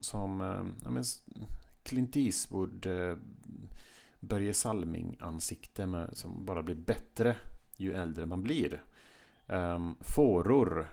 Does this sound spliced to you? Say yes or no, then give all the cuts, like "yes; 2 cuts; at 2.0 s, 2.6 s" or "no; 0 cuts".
no; 0 cuts